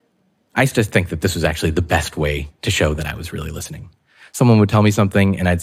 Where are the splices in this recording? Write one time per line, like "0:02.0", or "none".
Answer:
none